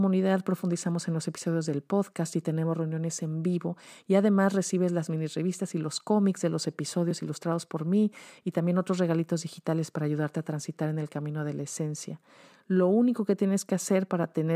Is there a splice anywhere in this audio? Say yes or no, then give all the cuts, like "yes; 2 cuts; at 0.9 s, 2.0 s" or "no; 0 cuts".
no; 0 cuts